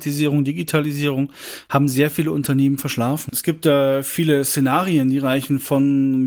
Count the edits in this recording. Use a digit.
1